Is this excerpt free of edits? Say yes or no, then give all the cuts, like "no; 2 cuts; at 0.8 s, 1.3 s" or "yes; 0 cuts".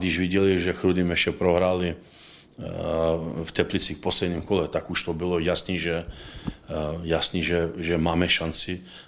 yes; 0 cuts